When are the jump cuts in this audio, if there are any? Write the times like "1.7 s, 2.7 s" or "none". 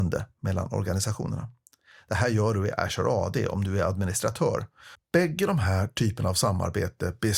5.0 s